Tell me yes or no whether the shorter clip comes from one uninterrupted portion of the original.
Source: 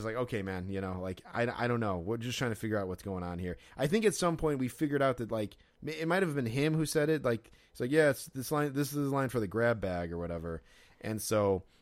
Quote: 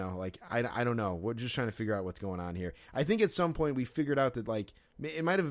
yes